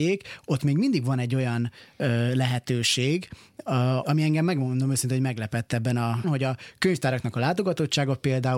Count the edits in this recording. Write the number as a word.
two